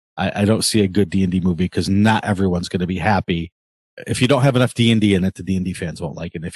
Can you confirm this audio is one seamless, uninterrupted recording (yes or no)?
yes